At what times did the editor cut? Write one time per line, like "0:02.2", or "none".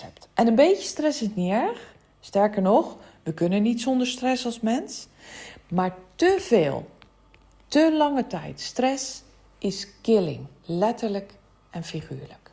none